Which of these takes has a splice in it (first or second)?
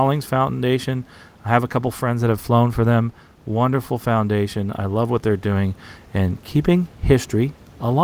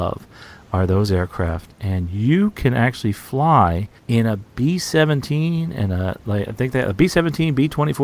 second